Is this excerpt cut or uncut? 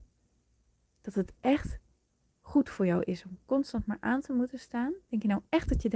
uncut